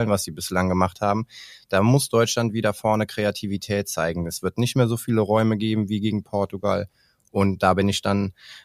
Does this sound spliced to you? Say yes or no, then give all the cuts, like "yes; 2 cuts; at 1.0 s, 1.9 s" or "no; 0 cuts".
no; 0 cuts